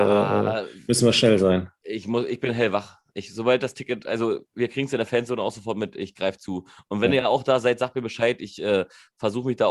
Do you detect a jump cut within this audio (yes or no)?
no